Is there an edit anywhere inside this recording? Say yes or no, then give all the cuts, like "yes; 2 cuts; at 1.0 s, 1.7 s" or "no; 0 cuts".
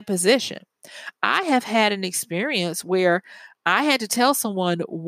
no; 0 cuts